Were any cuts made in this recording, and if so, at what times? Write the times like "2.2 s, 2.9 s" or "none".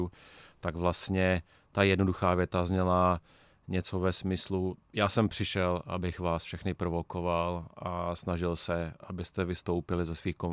none